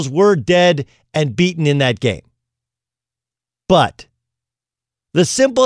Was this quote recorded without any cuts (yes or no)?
yes